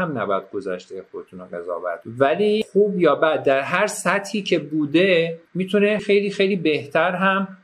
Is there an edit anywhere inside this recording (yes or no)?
yes